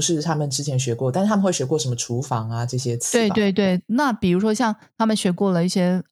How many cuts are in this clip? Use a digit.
0